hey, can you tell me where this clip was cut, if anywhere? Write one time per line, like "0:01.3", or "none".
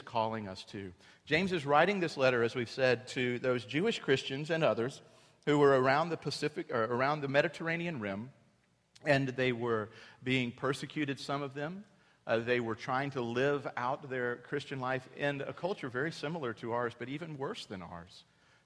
none